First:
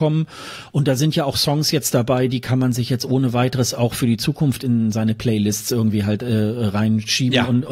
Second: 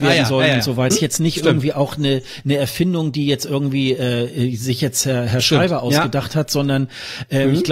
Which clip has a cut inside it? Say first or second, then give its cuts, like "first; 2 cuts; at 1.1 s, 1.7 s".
second; 1 cut; at 0.9 s